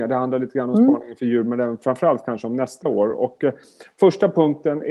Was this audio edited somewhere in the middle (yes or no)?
no